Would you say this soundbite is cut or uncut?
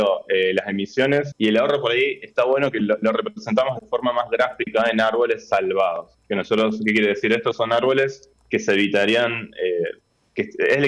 cut